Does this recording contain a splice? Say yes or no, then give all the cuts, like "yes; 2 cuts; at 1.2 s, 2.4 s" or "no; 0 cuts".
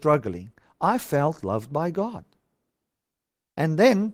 no; 0 cuts